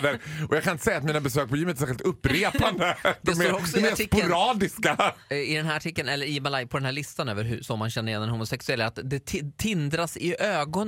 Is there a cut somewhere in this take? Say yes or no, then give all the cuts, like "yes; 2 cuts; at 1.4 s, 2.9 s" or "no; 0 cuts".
no; 0 cuts